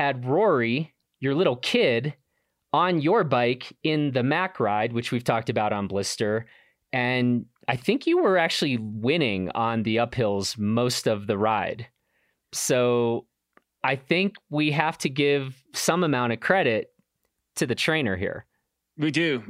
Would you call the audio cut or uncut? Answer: cut